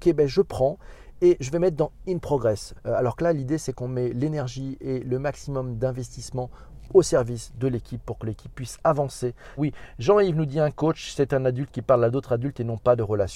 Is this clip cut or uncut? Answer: cut